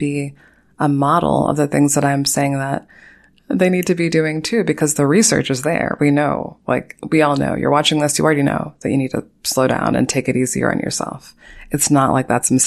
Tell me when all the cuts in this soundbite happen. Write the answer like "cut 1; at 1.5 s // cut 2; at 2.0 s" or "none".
none